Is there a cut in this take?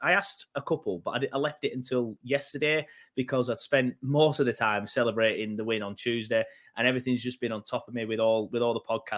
no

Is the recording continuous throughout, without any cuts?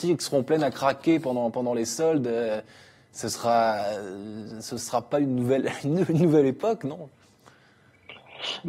yes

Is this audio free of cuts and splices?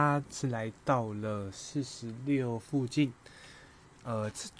yes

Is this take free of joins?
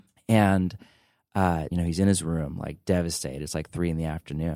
no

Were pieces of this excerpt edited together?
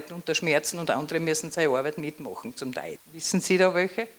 yes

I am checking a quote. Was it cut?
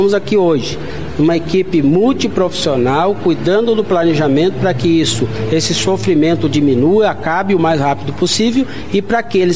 no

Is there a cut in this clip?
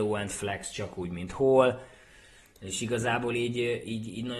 no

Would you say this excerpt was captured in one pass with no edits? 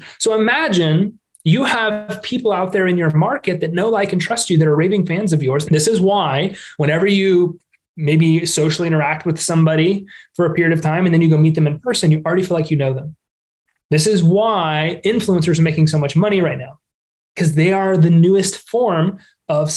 no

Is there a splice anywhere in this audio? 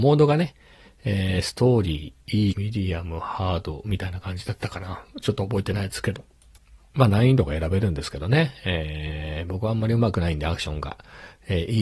yes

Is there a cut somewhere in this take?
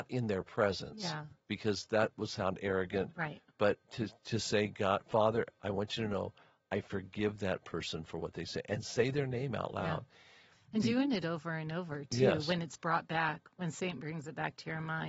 no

